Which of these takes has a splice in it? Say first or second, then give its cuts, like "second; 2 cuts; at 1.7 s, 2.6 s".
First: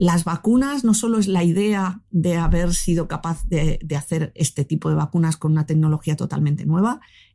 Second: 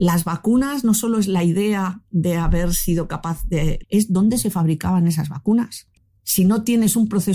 second; 1 cut; at 3.8 s